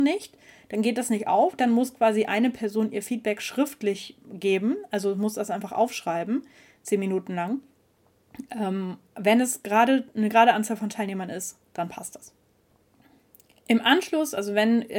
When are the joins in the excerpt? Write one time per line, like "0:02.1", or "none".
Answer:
none

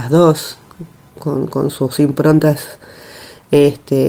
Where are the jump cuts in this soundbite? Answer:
none

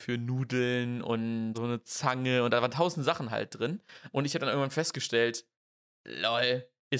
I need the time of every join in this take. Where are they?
0:01.5
0:04.1

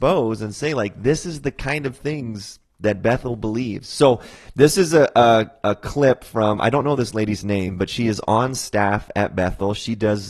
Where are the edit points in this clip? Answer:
none

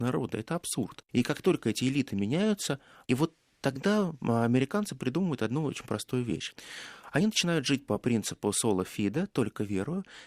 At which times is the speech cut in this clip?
0:01.1
0:03.1

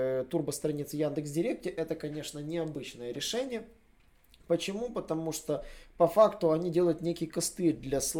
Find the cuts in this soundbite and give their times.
none

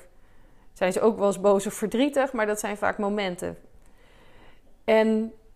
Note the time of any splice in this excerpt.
none

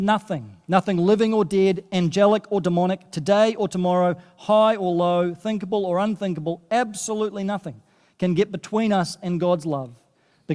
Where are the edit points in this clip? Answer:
none

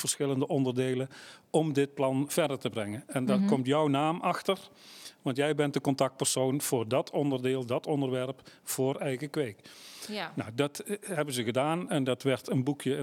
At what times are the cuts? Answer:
none

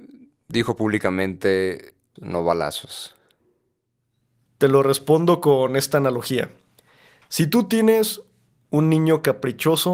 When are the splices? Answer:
0:02.2

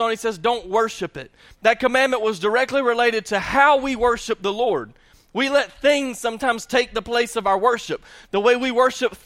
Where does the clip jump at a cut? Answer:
none

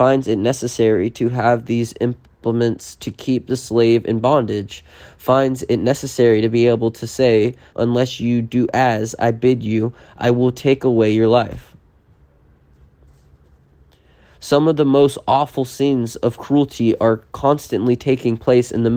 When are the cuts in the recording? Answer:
0:07.7

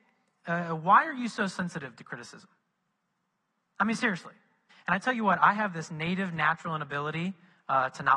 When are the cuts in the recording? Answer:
0:04.7

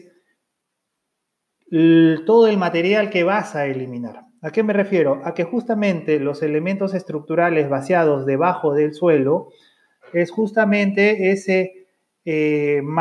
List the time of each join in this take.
none

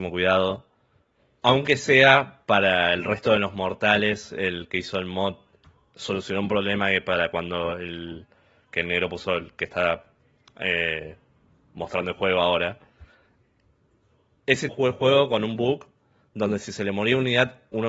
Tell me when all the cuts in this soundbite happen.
0:14.7

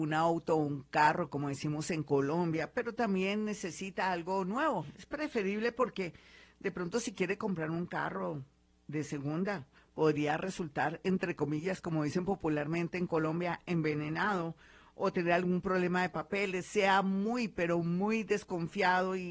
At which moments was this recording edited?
none

